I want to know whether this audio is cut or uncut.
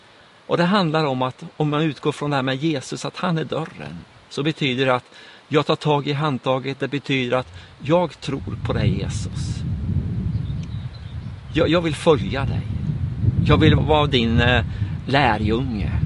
cut